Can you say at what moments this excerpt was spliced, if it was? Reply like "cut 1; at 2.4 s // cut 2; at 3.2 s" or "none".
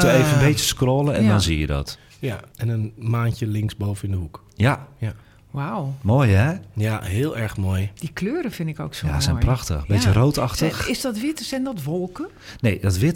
cut 1; at 2.5 s